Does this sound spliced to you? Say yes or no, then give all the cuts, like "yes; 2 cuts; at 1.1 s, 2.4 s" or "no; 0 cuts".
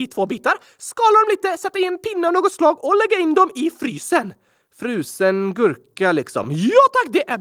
no; 0 cuts